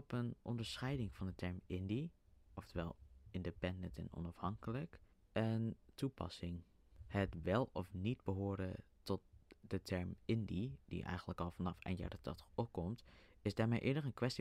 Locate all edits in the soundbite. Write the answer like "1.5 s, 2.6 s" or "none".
none